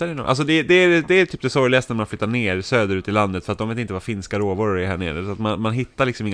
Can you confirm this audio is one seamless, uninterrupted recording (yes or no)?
yes